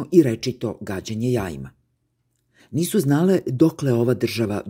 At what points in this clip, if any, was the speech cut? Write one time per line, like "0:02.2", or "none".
0:02.6